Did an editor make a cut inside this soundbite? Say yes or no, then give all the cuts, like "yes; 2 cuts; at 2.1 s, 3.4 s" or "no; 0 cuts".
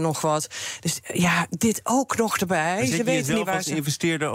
no; 0 cuts